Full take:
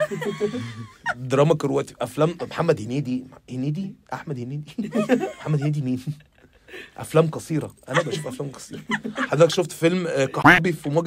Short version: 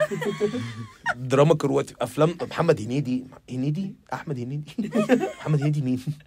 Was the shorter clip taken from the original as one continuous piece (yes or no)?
yes